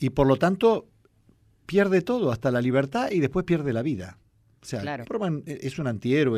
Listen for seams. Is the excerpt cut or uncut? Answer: cut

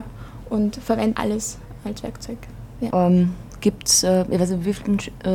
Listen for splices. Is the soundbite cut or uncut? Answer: cut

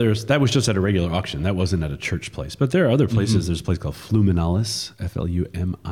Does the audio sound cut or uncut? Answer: uncut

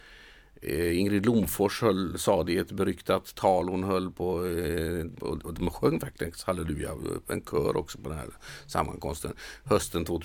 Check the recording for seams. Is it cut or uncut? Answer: cut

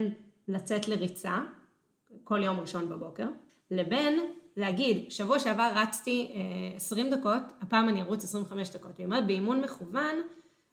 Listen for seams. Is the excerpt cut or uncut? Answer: cut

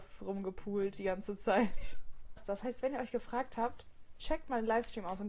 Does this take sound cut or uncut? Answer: cut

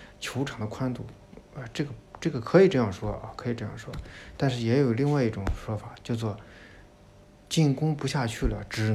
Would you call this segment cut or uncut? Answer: uncut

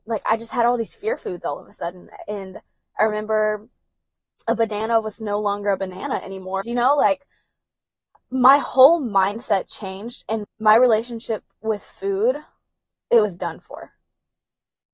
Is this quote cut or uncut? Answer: cut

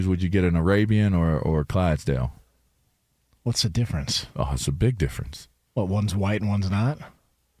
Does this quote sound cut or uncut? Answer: uncut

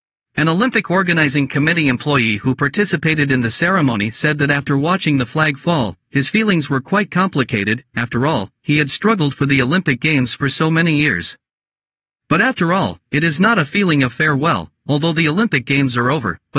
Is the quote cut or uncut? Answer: uncut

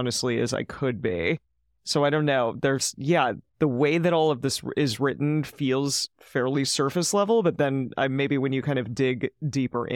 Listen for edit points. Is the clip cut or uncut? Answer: uncut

